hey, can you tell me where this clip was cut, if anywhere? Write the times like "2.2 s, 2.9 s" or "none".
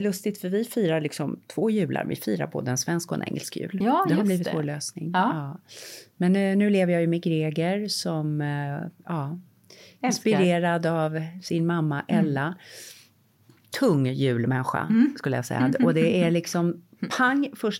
none